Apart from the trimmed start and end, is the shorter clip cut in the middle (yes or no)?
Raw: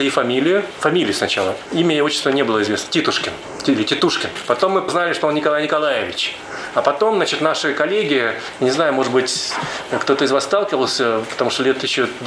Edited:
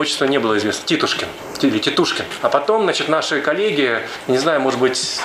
yes